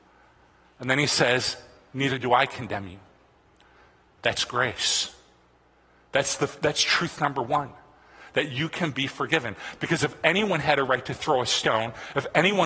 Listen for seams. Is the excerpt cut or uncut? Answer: uncut